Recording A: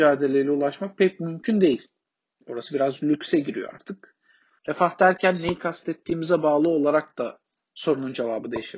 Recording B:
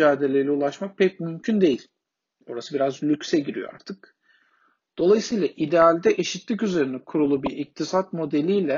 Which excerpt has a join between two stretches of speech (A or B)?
A